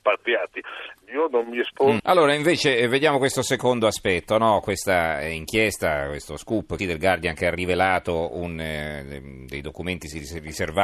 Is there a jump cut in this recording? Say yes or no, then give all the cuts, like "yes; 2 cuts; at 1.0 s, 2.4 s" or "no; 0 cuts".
yes; 3 cuts; at 1.0 s, 2.0 s, 6.8 s